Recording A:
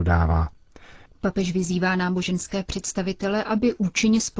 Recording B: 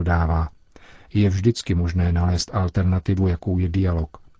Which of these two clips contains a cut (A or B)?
A